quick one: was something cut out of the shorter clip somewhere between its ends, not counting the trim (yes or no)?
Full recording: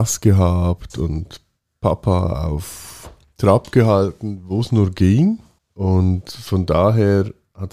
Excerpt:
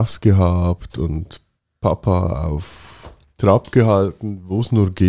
no